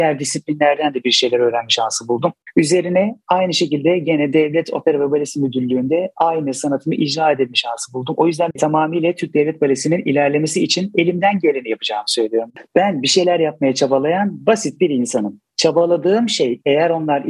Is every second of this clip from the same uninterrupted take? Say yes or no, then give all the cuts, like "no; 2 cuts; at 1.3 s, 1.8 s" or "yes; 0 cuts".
yes; 0 cuts